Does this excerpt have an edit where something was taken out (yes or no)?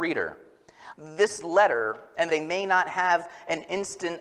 yes